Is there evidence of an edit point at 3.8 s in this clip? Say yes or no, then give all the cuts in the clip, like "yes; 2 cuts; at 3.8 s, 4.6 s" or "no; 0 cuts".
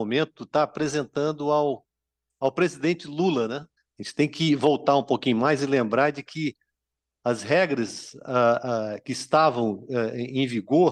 yes; 1 cut; at 3.8 s